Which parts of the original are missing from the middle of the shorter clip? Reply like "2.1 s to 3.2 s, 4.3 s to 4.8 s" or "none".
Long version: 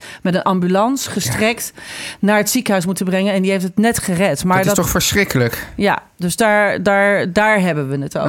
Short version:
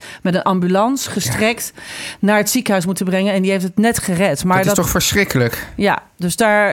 none